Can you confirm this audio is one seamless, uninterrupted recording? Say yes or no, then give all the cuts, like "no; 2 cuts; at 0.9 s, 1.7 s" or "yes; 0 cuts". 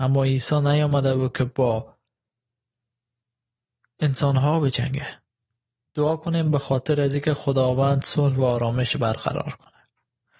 no; 1 cut; at 5.8 s